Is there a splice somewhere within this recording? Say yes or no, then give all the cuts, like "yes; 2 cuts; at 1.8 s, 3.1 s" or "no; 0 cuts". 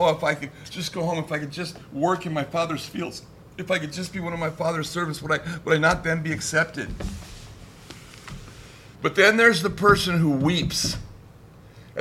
yes; 1 cut; at 9.0 s